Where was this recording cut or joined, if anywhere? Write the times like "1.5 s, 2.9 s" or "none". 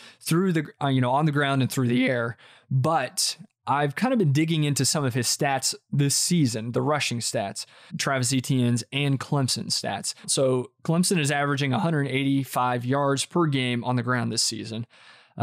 7.9 s, 10.2 s

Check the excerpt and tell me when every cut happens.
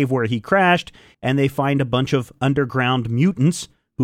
1.1 s

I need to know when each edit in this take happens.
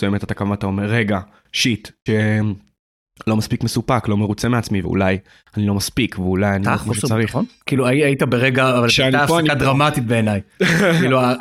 2.1 s, 4.8 s

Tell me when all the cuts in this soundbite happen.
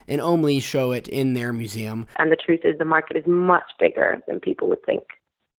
2.1 s

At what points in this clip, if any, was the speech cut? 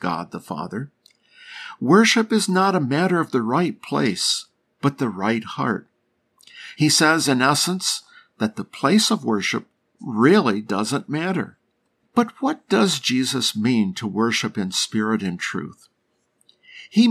6.7 s, 12.0 s

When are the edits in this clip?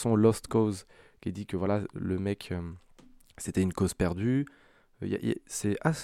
none

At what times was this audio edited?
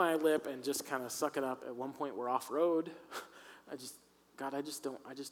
1.6 s

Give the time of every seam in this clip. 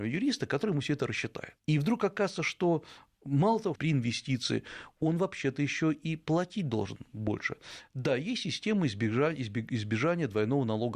1.6 s, 3.7 s

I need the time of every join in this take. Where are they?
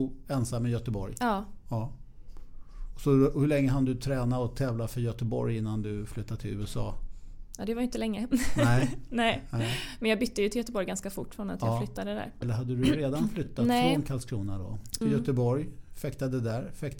12.4 s, 15.0 s

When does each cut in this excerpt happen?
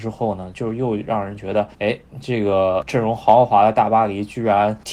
1.7 s

